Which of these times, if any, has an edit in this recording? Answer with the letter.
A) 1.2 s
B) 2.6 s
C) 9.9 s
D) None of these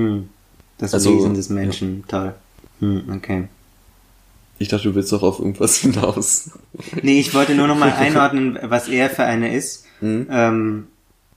B